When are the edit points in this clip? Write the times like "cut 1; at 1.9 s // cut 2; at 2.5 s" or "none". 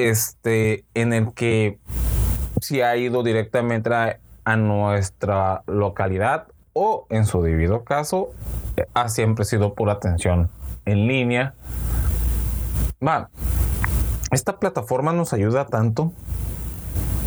cut 1; at 8.9 s